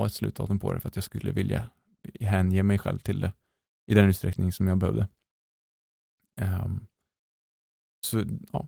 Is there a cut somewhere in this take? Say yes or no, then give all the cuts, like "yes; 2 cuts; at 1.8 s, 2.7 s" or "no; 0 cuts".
no; 0 cuts